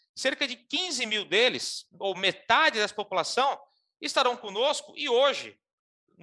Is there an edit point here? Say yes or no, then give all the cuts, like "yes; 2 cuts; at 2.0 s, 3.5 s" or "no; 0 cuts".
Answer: no; 0 cuts